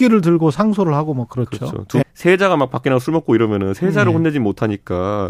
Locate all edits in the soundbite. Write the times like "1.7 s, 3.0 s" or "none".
2.0 s